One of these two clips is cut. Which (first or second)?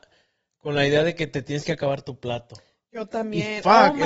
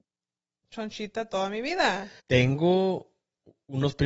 second